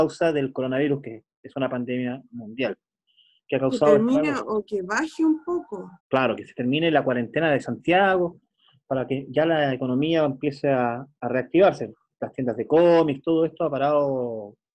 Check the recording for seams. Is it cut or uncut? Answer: cut